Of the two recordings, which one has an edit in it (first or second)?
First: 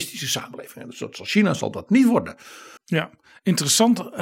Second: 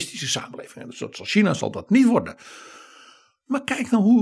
first